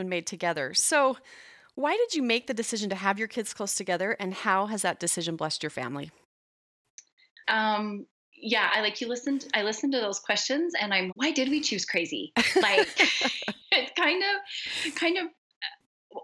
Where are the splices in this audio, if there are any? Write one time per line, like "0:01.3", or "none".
0:07.4
0:11.1

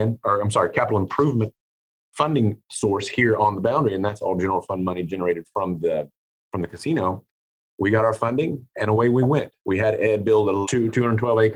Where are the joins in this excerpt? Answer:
0:09.6
0:10.6

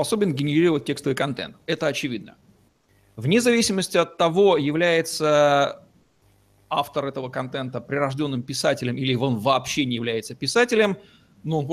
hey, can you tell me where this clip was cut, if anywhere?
none

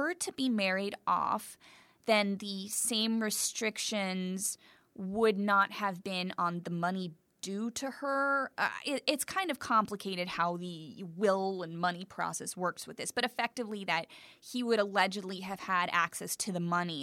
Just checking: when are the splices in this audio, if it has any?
none

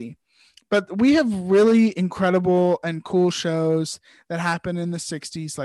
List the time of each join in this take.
none

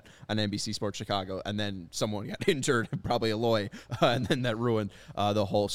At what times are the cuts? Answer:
none

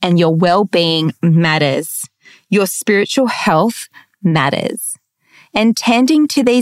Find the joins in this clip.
none

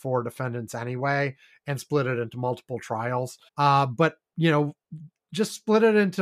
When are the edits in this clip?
0:03.5

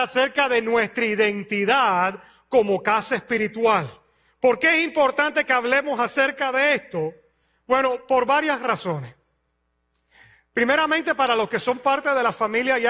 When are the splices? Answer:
none

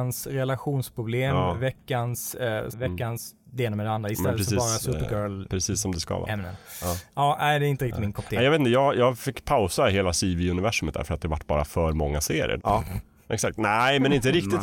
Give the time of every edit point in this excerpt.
0:02.7
0:12.6

